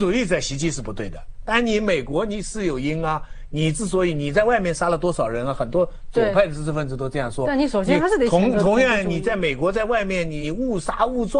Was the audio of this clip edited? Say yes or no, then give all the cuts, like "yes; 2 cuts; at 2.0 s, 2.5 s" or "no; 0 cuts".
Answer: yes; 1 cut; at 10.4 s